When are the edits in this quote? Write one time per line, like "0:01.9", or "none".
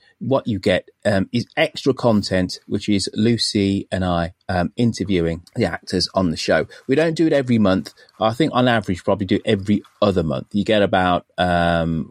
0:05.5